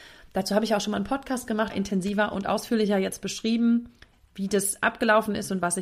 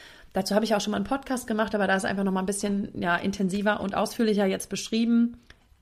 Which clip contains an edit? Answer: first; 1 cut; at 1.7 s

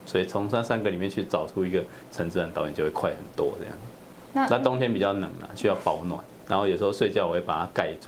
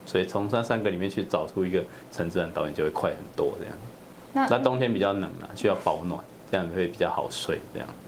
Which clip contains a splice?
second; 1 cut; at 6.4 s

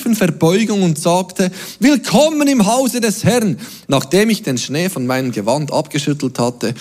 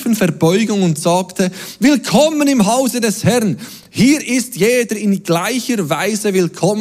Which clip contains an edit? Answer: first; 1 cut; at 3.8 s

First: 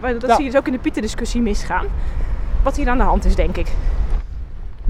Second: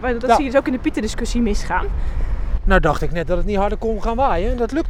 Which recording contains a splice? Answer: second; 1 cut; at 2.6 s

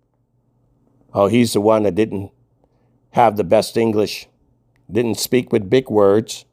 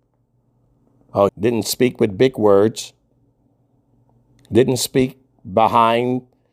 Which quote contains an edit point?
second; 1 cut; at 1.3 s

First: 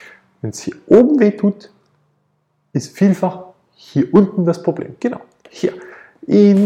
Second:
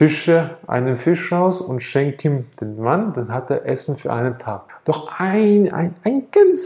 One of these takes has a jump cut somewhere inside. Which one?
second; 2 cuts; at 4.7 s, 5.7 s

